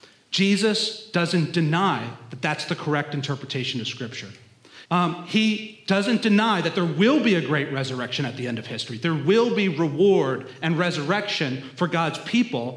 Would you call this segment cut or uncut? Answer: cut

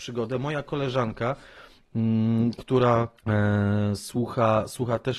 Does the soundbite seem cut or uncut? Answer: cut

